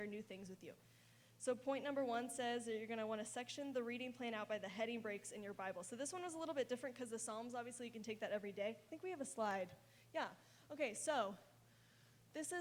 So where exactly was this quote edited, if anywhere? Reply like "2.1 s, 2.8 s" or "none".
none